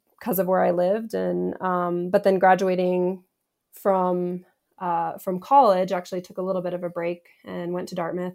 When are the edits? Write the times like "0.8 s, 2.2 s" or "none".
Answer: none